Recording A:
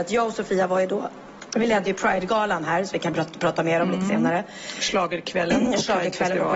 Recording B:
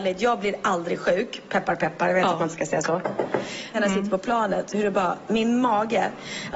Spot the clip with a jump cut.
B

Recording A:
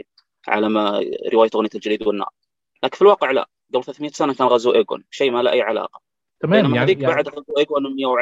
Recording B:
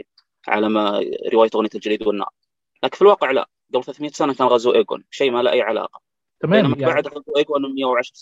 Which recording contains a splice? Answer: B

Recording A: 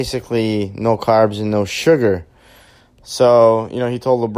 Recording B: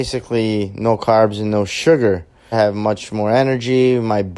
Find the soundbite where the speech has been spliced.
B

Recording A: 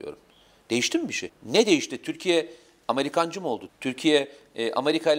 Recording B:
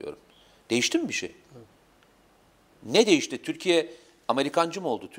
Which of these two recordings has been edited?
A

